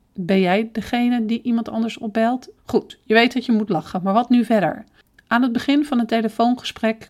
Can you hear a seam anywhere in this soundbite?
yes; 1 cut; at 2.6 s

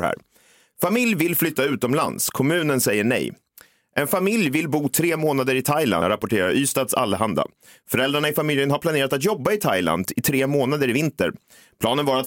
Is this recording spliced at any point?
yes; 1 cut; at 6.0 s

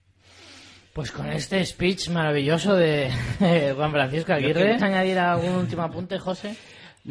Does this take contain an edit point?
yes; 1 cut; at 4.8 s

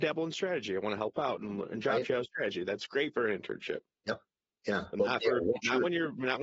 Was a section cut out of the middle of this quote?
no; 0 cuts

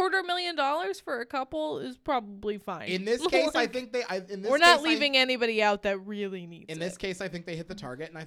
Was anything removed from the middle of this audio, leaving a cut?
no; 0 cuts

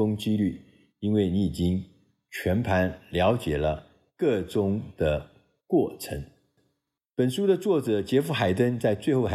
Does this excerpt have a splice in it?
no; 0 cuts

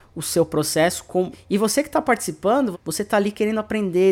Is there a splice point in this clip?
yes; 2 cuts; at 1.3 s, 2.7 s

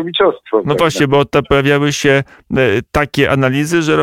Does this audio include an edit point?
no; 0 cuts

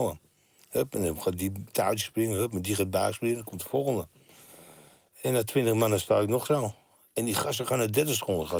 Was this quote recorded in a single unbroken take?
yes; 0 cuts

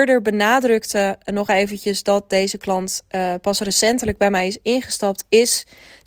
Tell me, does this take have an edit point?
no; 0 cuts

